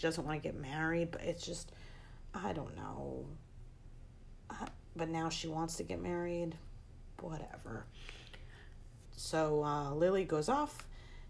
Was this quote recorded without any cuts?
no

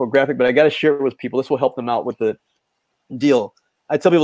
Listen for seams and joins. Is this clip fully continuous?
yes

